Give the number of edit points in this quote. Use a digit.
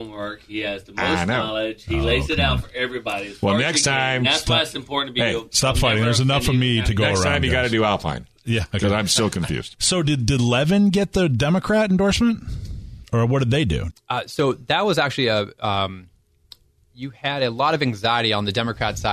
1